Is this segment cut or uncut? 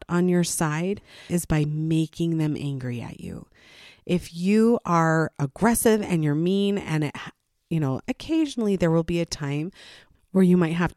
cut